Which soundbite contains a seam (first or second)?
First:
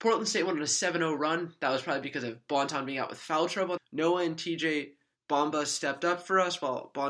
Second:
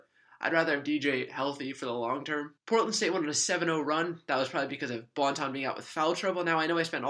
first